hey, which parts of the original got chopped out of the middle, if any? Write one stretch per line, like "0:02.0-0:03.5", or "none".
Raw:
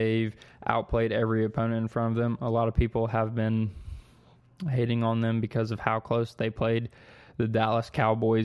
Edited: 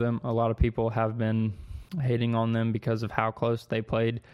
0:04.1-0:04.6

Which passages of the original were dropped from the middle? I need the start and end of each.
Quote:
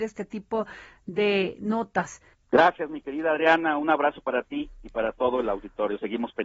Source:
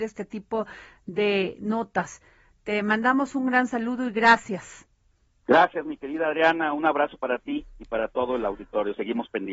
0:02.3-0:05.3

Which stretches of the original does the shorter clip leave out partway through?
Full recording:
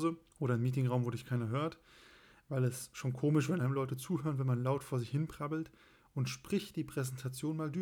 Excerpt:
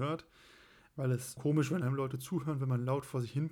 0:02.9-0:03.1

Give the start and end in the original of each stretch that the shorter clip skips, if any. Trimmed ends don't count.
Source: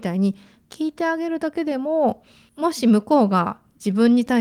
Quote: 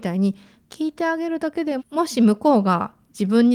0:01.8-0:02.4

